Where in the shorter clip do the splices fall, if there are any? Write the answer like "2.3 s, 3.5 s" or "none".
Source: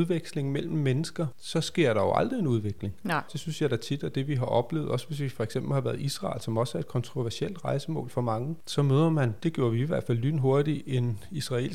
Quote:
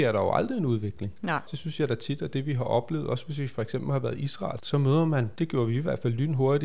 4.6 s